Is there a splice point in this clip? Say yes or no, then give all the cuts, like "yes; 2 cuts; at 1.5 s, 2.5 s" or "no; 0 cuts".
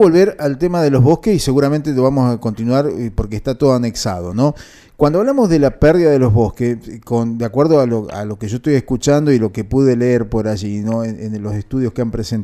no; 0 cuts